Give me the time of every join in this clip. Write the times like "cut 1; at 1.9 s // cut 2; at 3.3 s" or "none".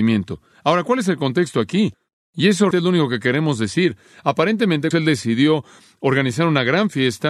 cut 1; at 2.7 s // cut 2; at 4.9 s